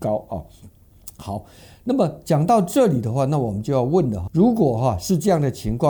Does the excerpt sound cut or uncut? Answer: cut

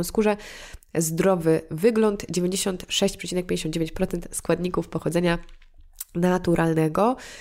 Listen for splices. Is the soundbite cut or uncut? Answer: uncut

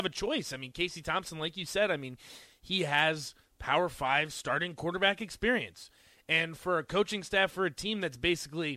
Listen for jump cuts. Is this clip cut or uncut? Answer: uncut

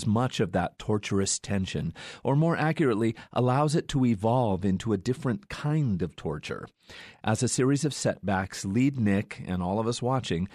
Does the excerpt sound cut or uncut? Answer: uncut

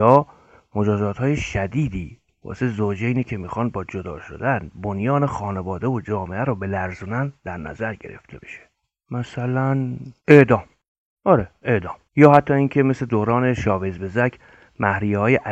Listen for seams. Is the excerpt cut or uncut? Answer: cut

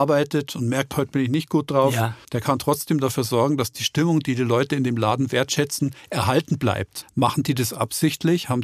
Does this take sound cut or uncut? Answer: cut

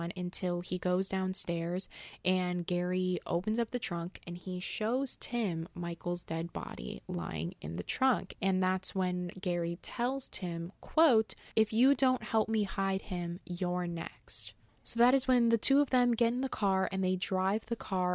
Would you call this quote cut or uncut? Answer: uncut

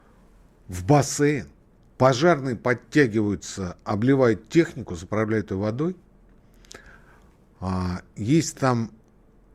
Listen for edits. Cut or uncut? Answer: uncut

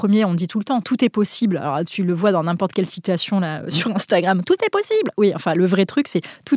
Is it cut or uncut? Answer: uncut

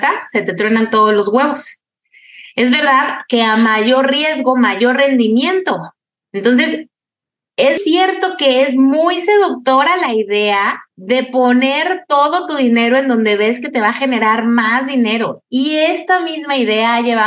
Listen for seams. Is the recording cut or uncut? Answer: cut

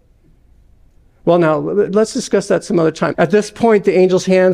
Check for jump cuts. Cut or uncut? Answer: cut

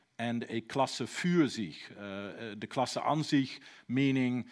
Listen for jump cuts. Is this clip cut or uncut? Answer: uncut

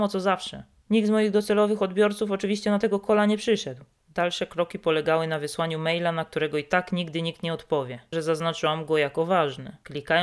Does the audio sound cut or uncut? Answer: cut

